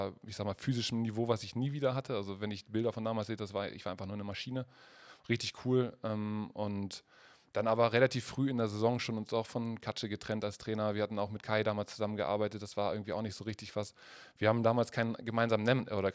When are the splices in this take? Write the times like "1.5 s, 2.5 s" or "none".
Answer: none